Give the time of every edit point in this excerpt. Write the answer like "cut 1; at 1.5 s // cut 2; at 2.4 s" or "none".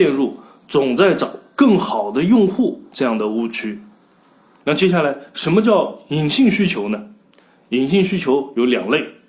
cut 1; at 4.6 s